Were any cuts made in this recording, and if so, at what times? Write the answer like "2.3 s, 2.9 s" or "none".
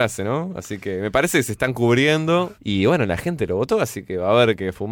2.6 s

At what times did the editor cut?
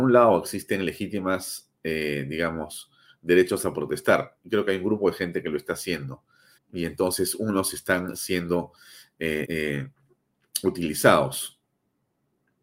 6.6 s, 9.4 s

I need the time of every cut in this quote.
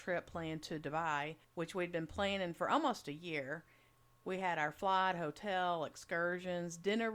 1.4 s

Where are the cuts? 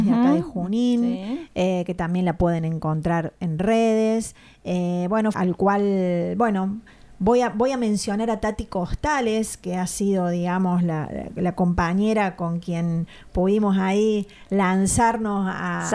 5.3 s

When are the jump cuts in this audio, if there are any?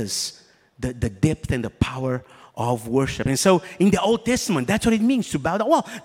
none

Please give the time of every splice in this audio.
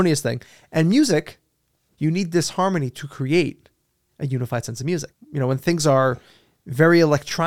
1.9 s, 5.1 s

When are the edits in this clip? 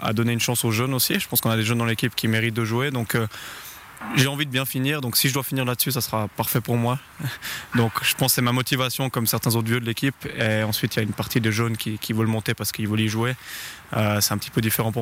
none

